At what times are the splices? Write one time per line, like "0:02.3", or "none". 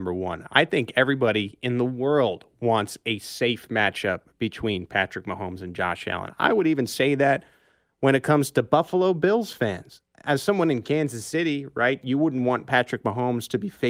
none